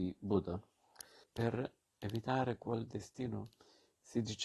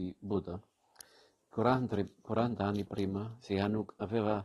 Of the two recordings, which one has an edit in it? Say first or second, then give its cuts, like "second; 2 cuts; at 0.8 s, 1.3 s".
first; 1 cut; at 1.2 s